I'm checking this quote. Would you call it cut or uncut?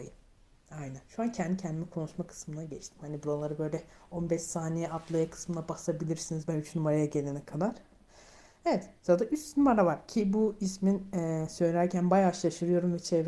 uncut